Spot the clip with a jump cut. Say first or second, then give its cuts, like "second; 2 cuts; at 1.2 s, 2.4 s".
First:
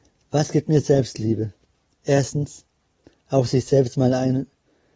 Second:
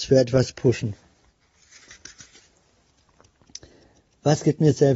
first; 1 cut; at 3.1 s